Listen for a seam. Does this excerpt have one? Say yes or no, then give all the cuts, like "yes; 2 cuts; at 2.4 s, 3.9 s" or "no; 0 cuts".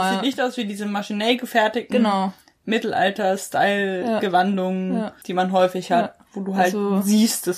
no; 0 cuts